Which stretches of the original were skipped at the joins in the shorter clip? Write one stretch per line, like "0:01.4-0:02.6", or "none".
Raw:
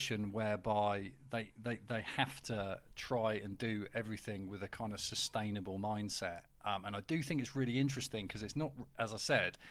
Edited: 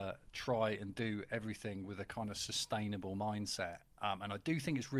none